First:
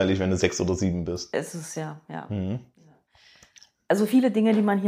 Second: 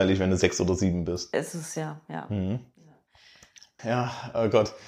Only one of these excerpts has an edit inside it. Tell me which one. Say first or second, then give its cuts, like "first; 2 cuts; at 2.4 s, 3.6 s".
second; 1 cut; at 3.8 s